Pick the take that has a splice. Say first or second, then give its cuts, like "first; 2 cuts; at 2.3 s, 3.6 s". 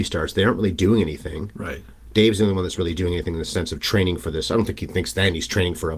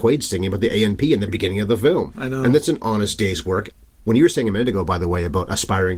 second; 1 cut; at 1.3 s